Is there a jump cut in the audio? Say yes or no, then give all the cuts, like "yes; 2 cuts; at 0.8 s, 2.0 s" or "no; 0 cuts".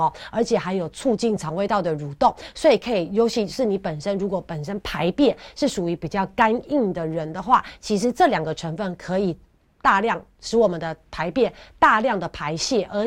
no; 0 cuts